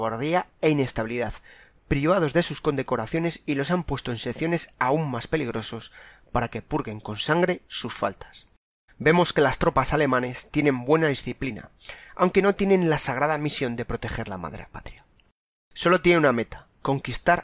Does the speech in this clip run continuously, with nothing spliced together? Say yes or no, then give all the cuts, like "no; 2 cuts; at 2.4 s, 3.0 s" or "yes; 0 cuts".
no; 1 cut; at 8.9 s